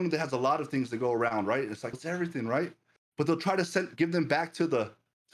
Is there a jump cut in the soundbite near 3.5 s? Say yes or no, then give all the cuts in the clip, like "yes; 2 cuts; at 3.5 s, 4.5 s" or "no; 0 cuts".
no; 1 cut; at 1.9 s